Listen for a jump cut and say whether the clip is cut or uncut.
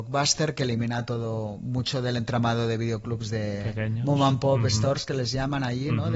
uncut